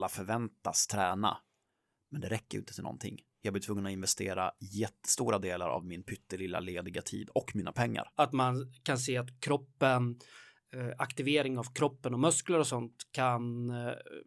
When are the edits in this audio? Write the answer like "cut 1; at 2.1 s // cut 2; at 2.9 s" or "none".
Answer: cut 1; at 8.1 s